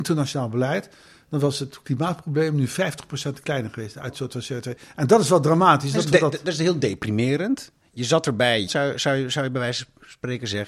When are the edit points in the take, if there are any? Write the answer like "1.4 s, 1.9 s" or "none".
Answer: 8.7 s